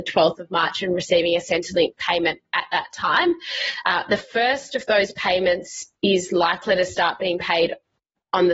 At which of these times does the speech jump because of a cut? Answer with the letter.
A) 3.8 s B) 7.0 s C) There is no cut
A